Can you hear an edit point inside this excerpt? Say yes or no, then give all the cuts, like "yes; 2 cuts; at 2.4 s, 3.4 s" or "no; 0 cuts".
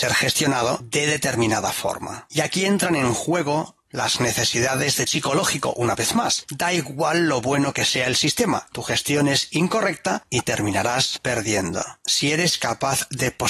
yes; 2 cuts; at 5.1 s, 6.4 s